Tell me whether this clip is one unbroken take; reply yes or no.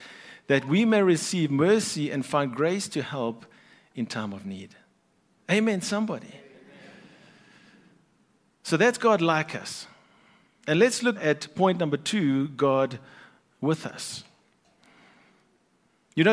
no